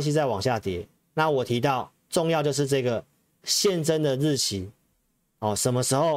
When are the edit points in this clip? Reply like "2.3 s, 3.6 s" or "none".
none